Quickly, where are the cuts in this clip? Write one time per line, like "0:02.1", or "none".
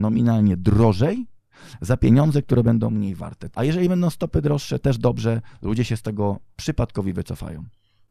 0:03.5